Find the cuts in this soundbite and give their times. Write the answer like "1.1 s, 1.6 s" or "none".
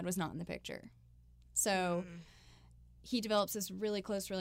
none